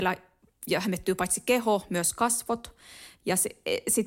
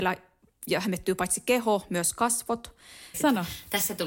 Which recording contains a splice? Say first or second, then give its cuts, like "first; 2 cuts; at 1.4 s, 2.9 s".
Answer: second; 1 cut; at 3.1 s